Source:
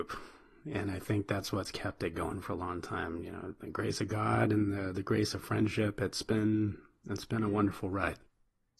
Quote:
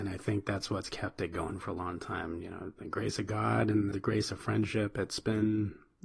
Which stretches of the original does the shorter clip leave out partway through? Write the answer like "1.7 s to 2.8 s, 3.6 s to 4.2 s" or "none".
4.7 s to 4.9 s